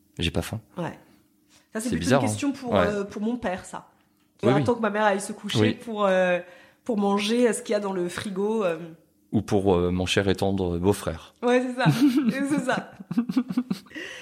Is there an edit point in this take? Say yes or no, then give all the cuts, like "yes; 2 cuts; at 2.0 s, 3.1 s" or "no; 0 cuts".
yes; 1 cut; at 4.4 s